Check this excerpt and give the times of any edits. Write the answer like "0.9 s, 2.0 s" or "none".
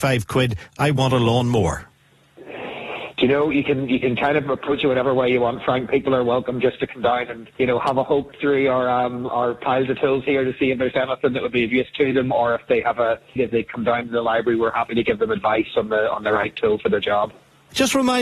7.5 s, 13.4 s